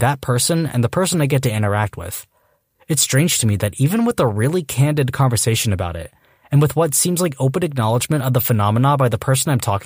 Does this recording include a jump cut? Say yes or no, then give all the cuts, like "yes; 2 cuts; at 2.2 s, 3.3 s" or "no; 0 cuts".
no; 0 cuts